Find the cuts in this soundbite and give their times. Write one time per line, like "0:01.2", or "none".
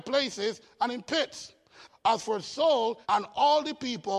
0:01.9
0:03.0